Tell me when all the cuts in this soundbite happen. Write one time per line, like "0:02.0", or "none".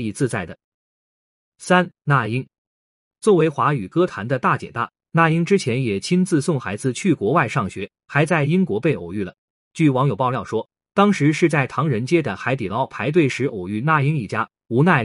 none